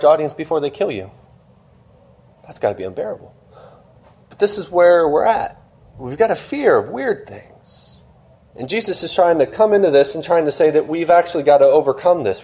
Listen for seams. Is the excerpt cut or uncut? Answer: uncut